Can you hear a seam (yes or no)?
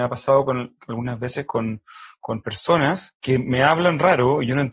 no